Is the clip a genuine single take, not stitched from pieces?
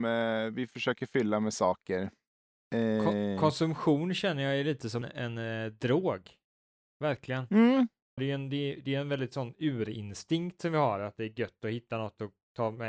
no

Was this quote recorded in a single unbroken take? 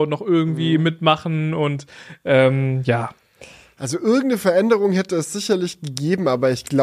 yes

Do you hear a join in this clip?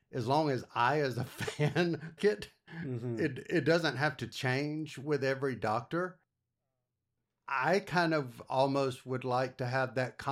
yes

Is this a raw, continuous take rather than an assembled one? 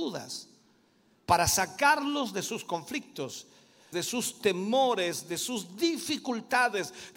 no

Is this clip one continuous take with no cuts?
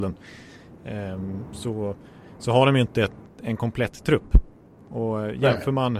yes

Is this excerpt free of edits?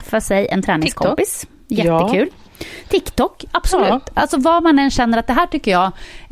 yes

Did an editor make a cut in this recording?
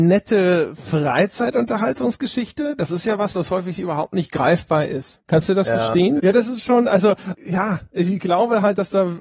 yes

